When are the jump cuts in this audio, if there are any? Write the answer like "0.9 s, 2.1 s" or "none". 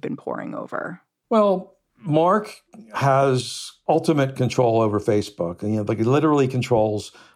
none

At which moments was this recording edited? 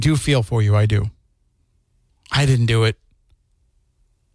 2.1 s

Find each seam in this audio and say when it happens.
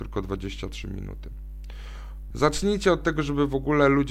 2.3 s

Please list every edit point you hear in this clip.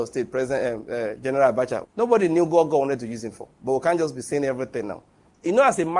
1.8 s

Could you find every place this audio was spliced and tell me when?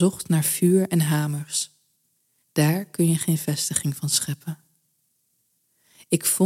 2.4 s

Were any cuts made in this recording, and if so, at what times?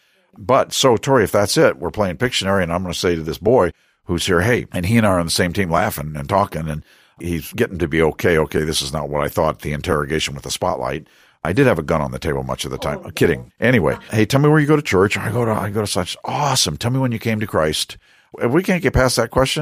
13.5 s

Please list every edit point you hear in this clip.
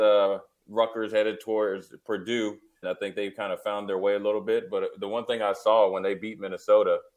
2.8 s

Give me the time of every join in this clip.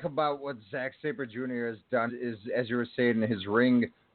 2.1 s

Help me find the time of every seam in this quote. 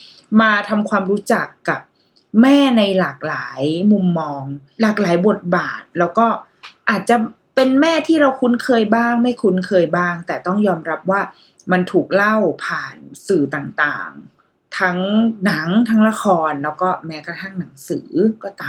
none

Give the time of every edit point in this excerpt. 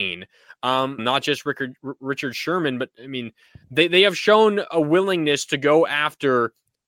1.0 s

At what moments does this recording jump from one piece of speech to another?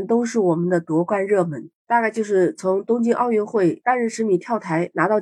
1.8 s

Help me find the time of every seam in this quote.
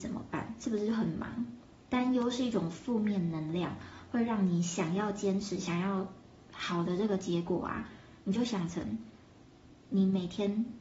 1.8 s

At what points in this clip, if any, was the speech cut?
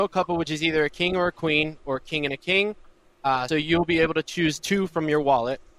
1.8 s, 3.5 s

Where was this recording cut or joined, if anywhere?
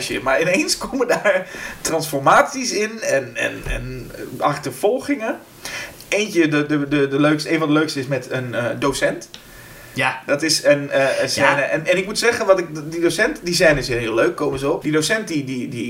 14.8 s

